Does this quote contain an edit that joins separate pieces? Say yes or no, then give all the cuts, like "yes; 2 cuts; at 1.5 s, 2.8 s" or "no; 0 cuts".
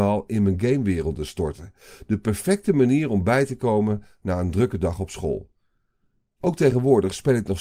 no; 0 cuts